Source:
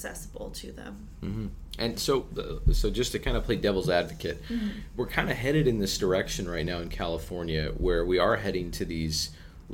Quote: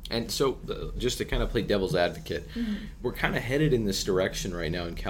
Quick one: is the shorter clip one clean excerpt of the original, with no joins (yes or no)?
no